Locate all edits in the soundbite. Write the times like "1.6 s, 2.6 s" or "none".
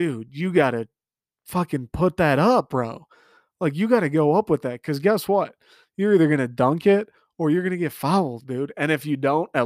none